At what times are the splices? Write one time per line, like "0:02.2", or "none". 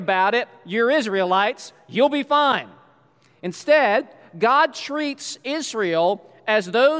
none